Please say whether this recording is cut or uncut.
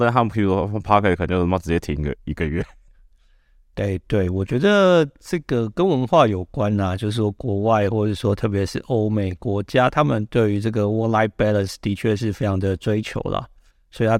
uncut